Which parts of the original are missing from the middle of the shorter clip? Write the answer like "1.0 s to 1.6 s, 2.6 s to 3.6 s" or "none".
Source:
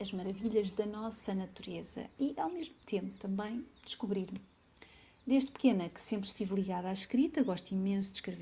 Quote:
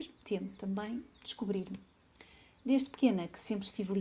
none